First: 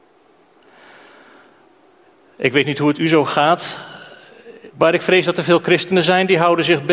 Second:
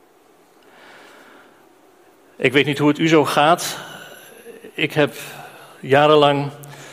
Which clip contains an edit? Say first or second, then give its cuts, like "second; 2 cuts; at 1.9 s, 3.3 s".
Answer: first; 1 cut; at 4.7 s